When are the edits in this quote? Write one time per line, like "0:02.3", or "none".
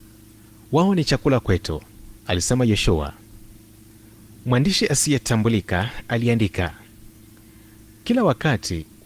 0:02.2